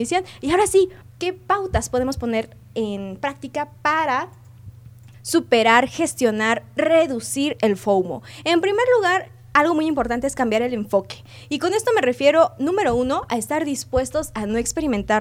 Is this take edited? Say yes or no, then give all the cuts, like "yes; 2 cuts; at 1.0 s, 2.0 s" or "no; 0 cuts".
yes; 2 cuts; at 1.0 s, 5.1 s